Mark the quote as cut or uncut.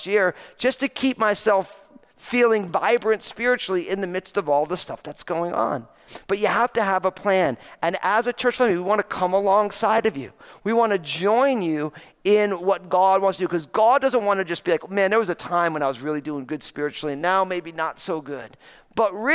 uncut